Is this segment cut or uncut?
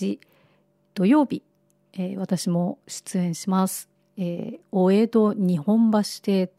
uncut